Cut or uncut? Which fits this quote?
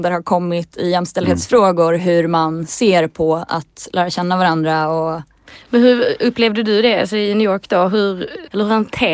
uncut